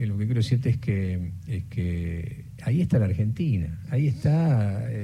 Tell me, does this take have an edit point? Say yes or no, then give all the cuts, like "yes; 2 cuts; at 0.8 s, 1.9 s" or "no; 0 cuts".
no; 0 cuts